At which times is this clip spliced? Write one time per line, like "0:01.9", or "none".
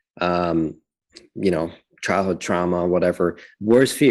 none